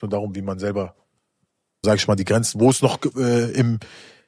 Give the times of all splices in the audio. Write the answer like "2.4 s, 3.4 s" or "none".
1.8 s, 3.1 s